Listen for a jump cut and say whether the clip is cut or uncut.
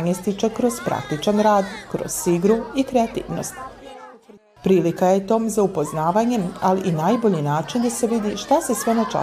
cut